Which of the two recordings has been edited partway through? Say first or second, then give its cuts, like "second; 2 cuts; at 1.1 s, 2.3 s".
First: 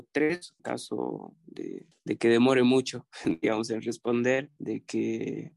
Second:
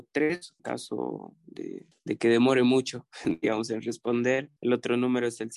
first; 1 cut; at 4.6 s